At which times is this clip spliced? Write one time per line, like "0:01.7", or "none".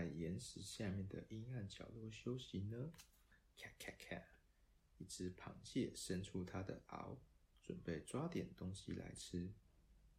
none